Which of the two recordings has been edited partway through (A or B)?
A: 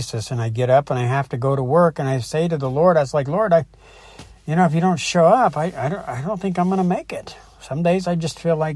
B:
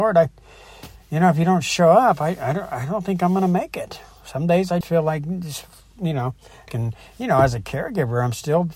B